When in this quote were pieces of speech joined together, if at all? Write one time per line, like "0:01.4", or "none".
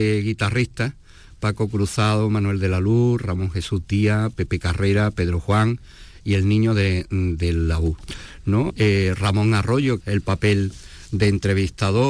0:08.7
0:10.0